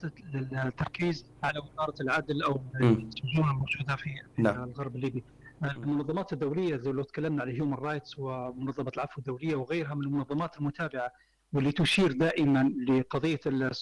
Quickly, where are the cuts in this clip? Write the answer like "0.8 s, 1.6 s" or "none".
1.3 s